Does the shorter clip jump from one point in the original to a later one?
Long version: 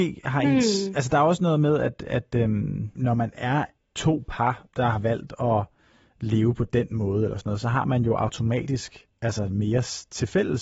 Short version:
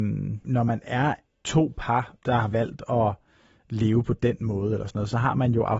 no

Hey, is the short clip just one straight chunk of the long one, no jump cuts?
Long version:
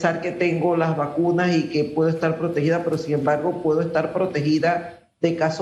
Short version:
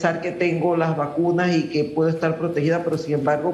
yes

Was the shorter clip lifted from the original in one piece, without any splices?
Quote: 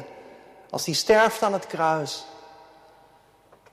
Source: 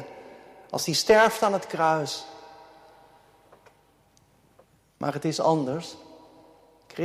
yes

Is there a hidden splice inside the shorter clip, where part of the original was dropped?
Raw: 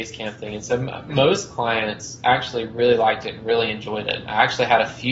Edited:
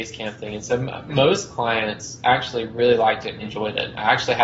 yes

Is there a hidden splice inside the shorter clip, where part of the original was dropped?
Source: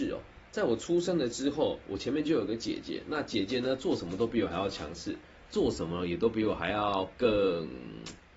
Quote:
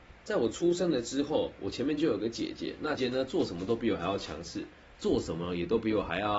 yes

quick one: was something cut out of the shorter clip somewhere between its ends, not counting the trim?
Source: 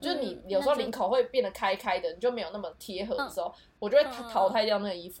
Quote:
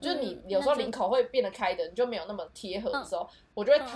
yes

